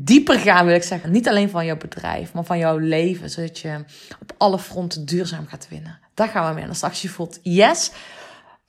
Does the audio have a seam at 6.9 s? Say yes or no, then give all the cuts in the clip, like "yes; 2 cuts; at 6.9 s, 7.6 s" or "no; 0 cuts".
no; 1 cut; at 1.0 s